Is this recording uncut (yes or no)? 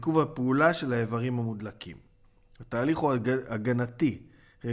yes